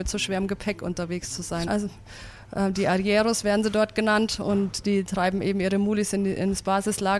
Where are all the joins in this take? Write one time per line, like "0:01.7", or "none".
0:01.7